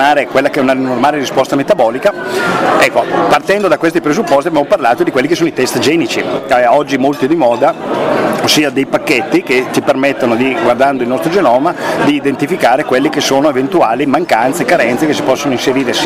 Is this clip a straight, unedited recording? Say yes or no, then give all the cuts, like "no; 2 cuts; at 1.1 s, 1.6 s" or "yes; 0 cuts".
yes; 0 cuts